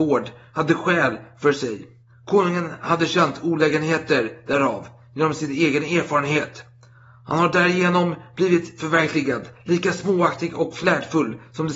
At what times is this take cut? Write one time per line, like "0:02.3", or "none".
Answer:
none